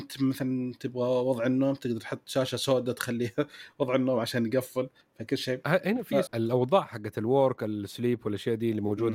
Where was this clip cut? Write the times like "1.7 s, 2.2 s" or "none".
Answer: 6.3 s